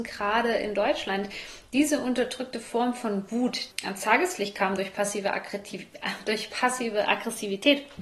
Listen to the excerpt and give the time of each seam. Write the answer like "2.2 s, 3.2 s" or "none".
3.7 s